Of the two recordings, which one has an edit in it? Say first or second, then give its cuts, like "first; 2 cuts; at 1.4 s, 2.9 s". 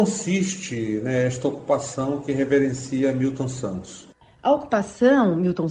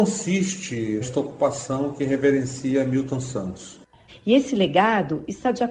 second; 2 cuts; at 1.0 s, 4.1 s